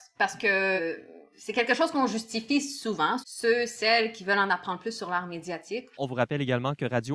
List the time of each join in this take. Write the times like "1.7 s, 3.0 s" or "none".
3.2 s, 5.9 s